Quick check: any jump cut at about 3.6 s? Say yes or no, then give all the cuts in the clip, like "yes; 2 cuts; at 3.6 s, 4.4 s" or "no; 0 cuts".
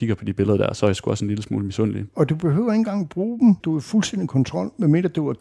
yes; 2 cuts; at 2.1 s, 3.6 s